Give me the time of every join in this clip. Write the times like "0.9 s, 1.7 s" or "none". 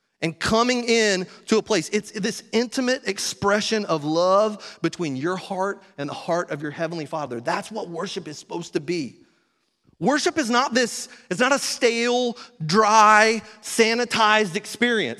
9.8 s